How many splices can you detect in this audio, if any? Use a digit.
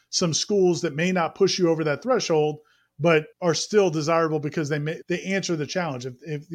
2